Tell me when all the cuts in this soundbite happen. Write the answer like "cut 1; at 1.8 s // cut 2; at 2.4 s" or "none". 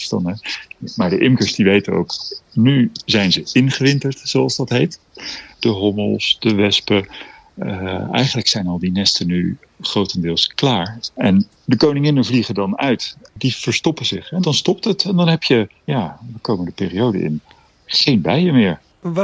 none